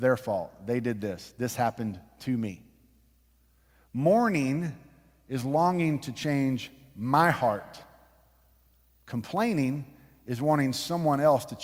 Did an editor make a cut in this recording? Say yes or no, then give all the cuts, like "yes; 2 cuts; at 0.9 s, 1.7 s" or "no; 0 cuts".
no; 0 cuts